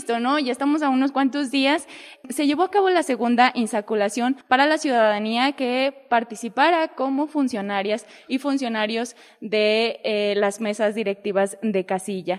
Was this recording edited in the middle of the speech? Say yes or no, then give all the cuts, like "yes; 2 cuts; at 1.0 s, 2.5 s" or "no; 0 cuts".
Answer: no; 0 cuts